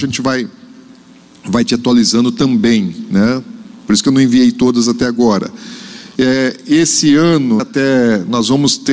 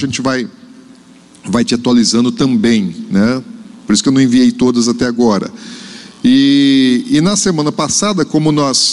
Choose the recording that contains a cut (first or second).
first